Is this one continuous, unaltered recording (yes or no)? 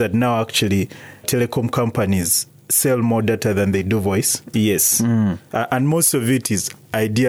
no